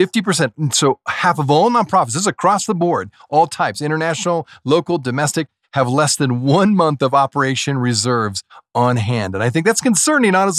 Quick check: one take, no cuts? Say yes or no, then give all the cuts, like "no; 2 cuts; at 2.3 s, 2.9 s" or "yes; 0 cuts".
yes; 0 cuts